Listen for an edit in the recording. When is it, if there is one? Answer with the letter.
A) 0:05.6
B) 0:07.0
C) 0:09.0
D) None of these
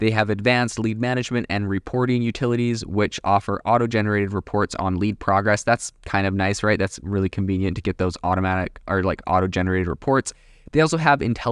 D